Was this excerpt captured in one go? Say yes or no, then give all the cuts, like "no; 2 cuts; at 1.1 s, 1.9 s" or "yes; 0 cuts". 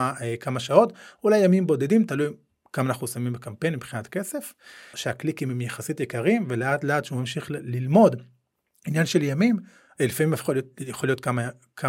no; 1 cut; at 4.9 s